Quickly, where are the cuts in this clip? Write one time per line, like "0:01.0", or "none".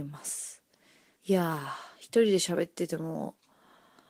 0:01.2